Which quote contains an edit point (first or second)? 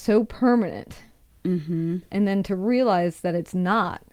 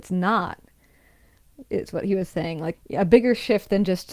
second